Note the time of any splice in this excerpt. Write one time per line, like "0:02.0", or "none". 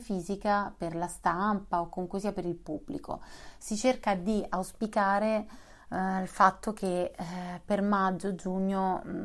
none